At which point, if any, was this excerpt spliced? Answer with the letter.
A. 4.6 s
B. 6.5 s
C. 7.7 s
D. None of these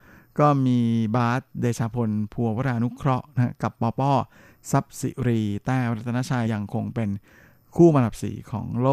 B